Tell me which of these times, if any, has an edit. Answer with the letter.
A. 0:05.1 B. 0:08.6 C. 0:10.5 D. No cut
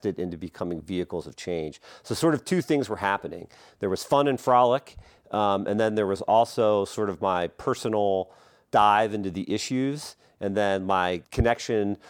D